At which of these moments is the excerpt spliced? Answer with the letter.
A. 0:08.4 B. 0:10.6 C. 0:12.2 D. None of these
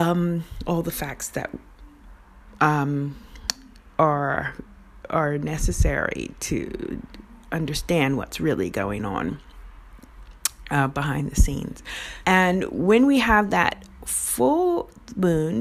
C